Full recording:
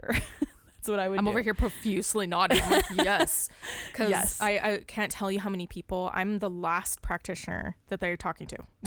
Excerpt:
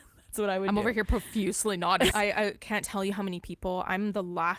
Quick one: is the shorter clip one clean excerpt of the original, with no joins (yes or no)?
no